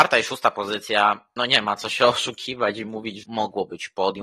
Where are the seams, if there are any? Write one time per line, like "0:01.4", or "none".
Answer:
0:01.4
0:03.2